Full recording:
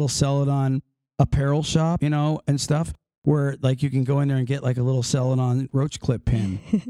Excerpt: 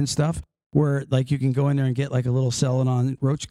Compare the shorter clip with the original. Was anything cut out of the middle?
no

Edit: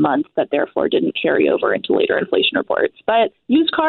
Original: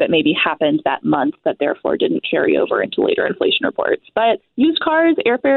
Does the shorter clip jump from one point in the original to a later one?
no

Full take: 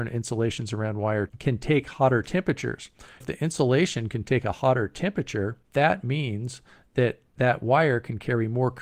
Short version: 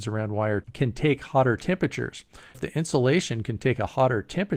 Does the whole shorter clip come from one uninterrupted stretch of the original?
yes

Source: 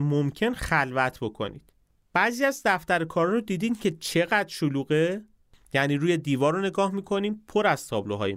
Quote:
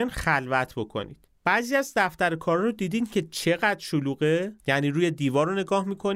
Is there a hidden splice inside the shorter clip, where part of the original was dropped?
yes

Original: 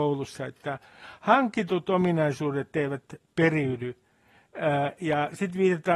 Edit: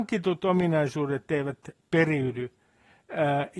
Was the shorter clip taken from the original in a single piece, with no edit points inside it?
yes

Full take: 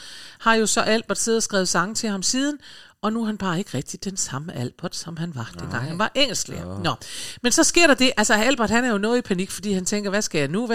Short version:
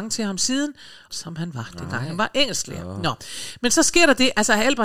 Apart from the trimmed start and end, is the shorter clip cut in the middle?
yes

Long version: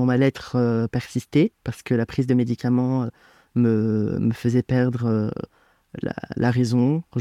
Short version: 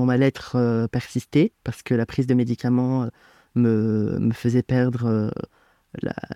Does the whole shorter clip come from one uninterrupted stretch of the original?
yes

